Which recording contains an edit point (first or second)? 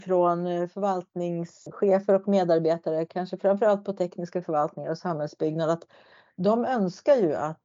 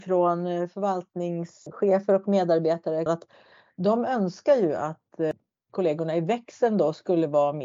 second